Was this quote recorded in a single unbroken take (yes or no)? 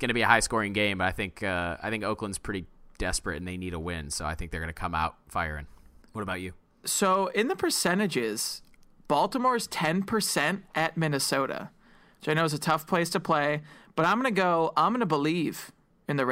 yes